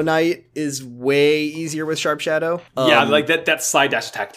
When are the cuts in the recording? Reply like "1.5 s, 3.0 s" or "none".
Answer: 2.7 s